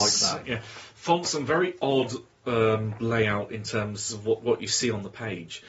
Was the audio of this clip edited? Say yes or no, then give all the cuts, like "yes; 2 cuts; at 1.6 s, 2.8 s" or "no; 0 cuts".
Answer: no; 0 cuts